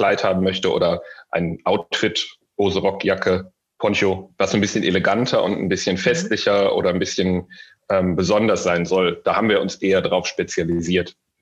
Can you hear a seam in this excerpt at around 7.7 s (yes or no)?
no